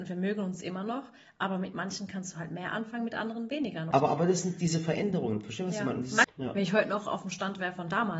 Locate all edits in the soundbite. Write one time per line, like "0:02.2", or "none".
0:03.9
0:06.2

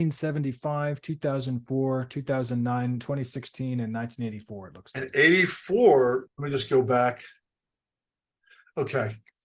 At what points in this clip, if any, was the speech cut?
0:06.3

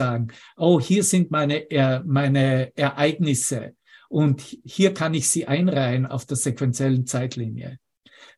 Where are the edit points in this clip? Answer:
none

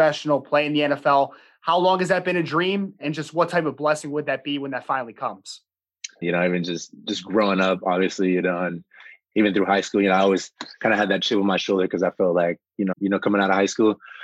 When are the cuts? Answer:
0:06.2
0:12.9

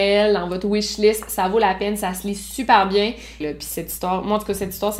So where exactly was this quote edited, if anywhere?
0:03.4

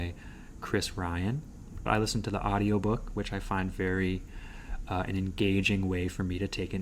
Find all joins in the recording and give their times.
0:01.9

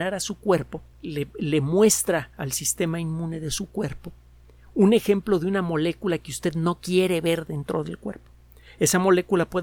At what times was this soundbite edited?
0:00.9

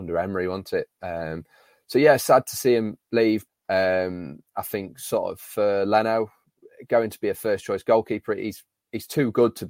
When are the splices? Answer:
0:03.5

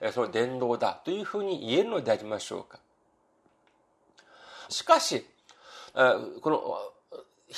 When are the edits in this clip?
0:04.7
0:05.9

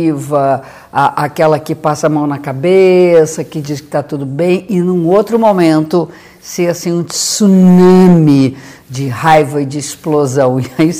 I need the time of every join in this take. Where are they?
none

